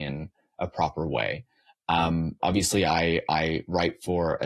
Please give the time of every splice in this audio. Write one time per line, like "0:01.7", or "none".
0:02.4